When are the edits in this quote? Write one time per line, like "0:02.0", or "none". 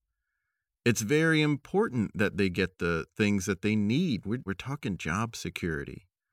0:04.5